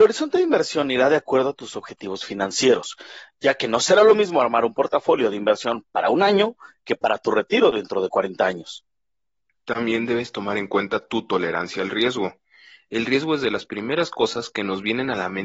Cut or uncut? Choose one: uncut